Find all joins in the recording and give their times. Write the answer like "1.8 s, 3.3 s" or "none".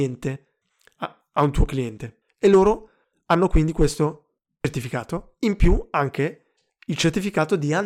2.2 s